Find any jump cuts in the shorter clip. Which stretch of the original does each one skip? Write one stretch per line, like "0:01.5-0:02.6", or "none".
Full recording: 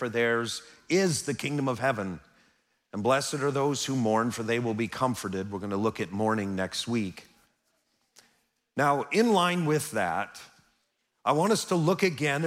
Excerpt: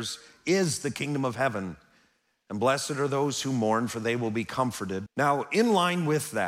0:05.5-0:08.7